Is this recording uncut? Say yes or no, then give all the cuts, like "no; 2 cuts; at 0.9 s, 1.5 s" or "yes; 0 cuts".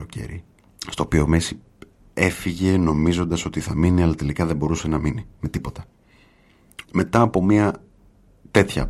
no; 1 cut; at 6.8 s